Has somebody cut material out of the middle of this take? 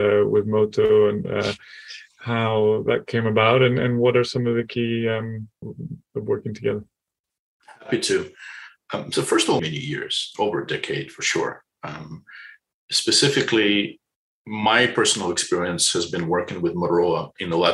yes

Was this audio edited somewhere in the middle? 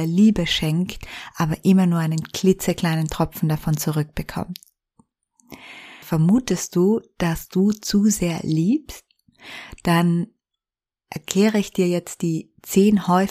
yes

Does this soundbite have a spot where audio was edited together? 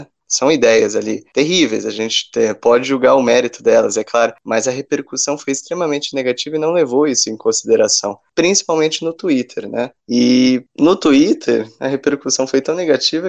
no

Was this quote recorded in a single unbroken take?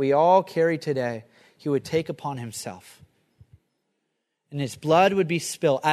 yes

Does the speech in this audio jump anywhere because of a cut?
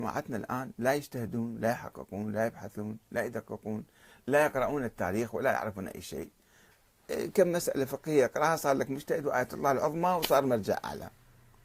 no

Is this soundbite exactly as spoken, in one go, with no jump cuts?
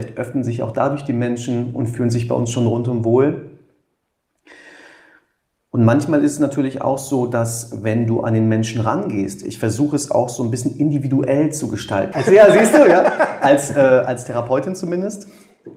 no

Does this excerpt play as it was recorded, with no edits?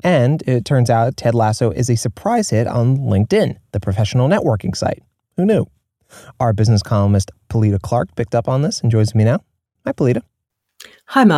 yes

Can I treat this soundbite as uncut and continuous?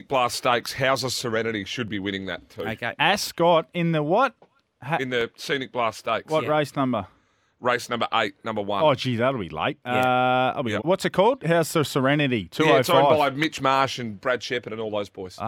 no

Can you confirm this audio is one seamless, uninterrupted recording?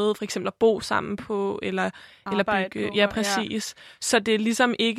yes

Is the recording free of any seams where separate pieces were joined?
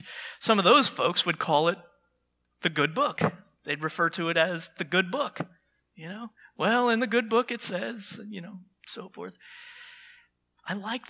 yes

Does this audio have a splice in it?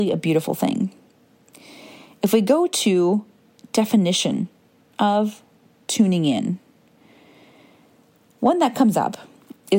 no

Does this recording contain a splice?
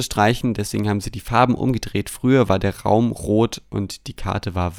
no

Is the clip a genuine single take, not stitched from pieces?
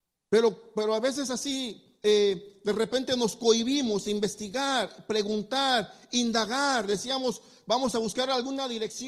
yes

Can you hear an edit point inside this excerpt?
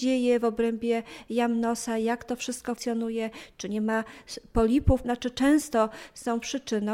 yes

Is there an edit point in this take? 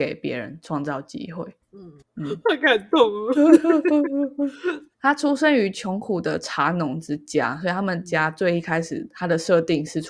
yes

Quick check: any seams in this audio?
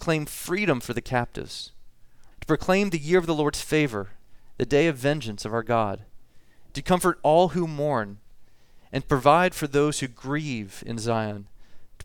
yes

